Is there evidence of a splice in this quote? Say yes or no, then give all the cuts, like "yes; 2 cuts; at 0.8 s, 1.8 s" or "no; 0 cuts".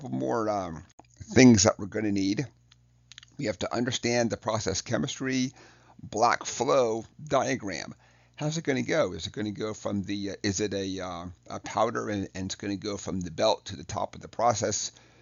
yes; 1 cut; at 7.1 s